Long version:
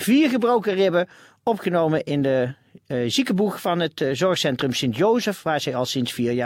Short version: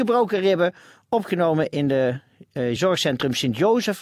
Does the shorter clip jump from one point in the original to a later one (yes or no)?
yes